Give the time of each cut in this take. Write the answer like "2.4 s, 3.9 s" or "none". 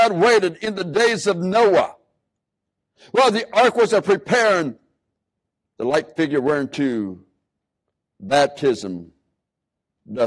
none